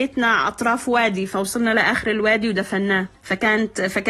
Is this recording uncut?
no; 1 cut; at 3.1 s

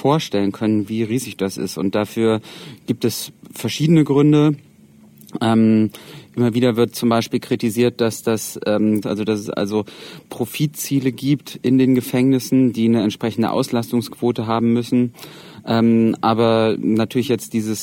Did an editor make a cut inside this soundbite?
yes; 1 cut; at 9.0 s

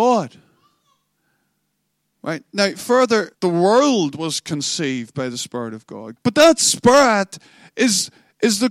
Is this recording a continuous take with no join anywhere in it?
no; 2 cuts; at 3.3 s, 6.2 s

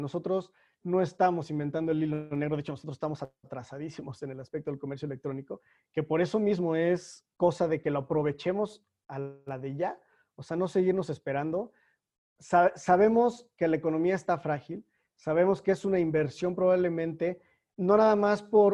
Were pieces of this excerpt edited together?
no; 0 cuts

